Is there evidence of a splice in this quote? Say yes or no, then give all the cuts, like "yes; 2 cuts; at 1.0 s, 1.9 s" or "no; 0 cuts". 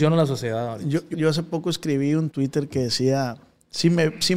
yes; 2 cuts; at 1.1 s, 2.3 s